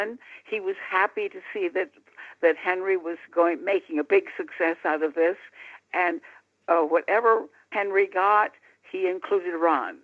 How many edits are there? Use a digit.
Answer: 2